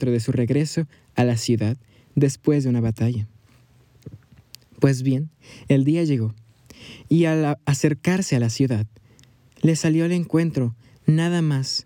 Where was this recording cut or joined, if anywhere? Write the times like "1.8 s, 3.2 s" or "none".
none